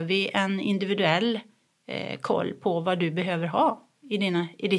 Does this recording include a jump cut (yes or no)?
no